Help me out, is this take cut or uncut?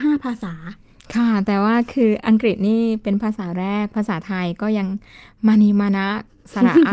uncut